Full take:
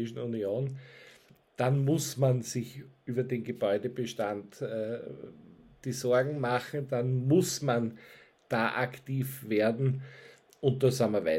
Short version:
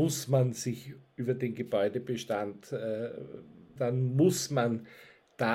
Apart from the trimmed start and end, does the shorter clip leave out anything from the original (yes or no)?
yes